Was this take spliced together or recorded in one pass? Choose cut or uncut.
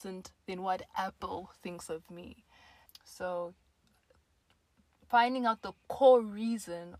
cut